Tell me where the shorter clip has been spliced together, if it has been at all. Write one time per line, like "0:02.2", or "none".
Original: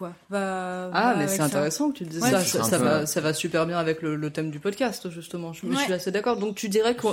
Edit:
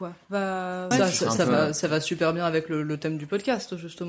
0:00.9